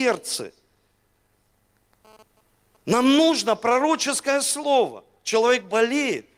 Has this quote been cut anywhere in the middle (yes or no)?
no